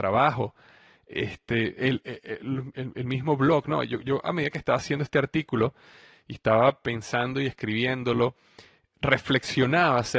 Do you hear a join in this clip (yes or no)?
no